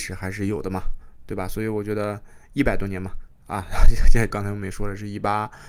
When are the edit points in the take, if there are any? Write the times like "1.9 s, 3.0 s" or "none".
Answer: 4.3 s